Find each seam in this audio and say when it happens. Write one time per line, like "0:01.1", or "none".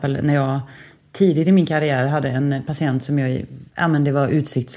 none